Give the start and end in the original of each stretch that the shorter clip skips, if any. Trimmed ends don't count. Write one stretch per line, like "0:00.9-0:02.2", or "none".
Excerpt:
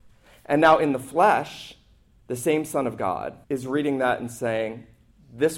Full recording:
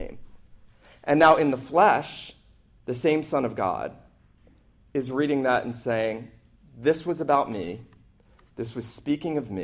0:04.0-0:04.9